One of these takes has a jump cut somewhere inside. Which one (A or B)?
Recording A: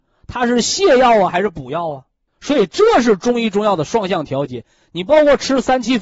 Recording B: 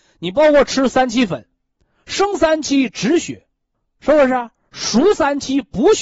A